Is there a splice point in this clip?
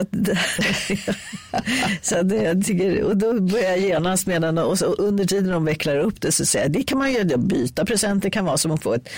no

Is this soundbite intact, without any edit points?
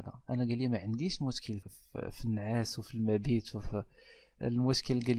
no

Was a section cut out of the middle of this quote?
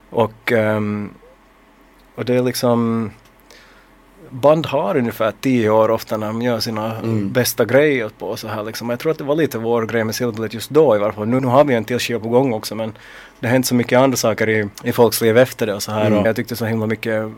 yes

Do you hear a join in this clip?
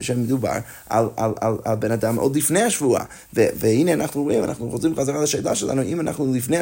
no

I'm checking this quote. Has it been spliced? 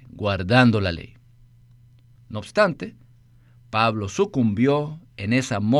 yes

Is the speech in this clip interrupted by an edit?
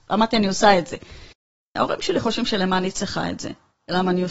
yes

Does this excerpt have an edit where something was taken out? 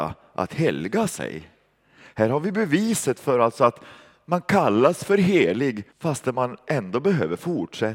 yes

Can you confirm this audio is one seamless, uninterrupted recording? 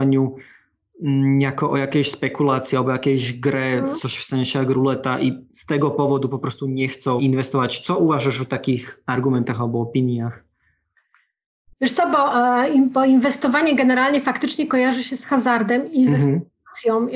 no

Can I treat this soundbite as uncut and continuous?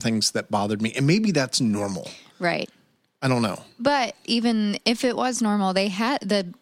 yes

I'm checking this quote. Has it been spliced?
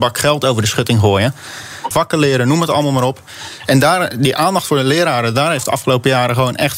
yes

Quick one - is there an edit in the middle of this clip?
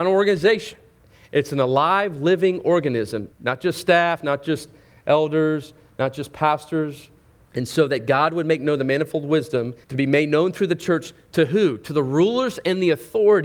yes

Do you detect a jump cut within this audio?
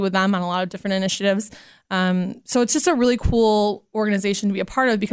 no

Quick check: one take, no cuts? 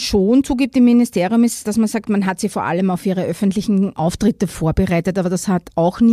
yes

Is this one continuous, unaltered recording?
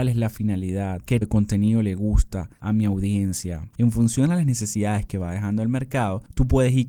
no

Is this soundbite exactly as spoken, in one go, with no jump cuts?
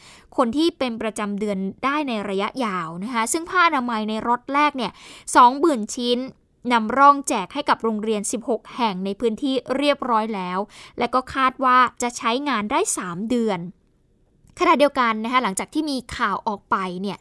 yes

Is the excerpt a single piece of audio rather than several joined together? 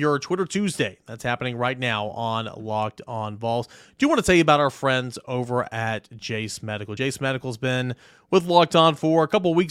yes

